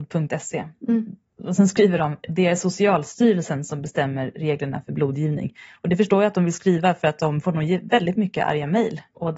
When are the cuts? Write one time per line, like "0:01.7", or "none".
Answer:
none

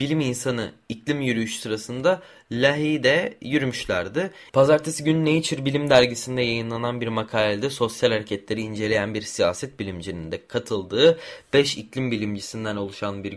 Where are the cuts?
0:04.5

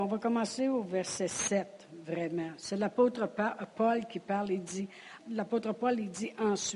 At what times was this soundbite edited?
0:05.2

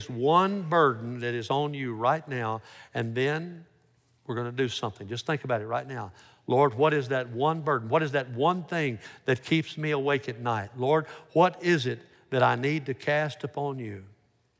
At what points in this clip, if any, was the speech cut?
none

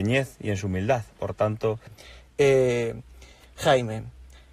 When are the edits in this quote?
none

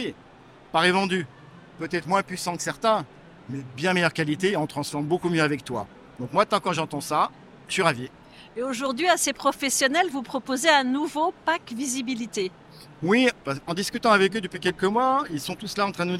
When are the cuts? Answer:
0:07.6

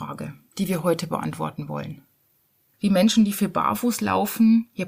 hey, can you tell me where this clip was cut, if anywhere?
0:02.7

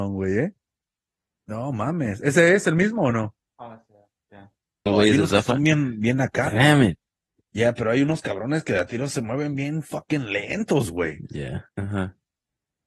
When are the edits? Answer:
0:04.9
0:11.7

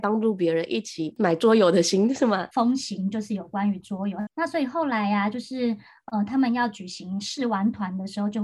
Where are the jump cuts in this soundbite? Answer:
0:02.5
0:04.3

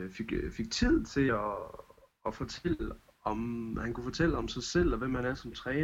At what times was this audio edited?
none

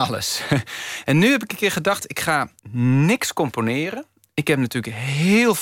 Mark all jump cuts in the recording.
0:02.6

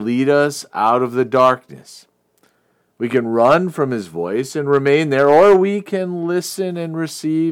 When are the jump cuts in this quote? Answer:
none

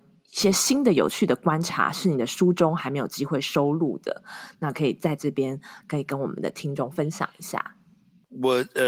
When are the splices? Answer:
none

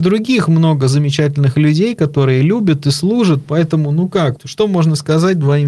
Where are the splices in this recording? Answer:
0:04.4

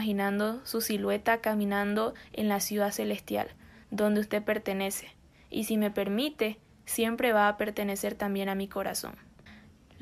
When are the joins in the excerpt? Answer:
none

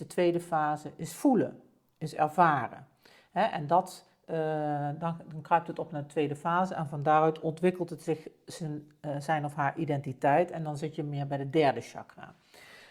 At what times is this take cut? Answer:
none

